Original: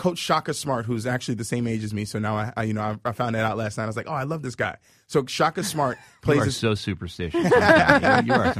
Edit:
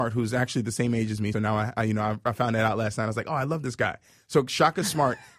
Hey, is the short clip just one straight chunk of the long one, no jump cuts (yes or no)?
no